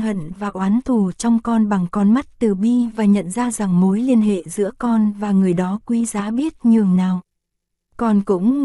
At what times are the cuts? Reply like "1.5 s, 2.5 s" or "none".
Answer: none